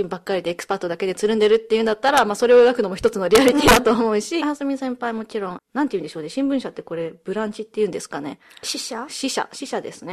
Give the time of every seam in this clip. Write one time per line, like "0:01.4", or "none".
0:04.4
0:05.6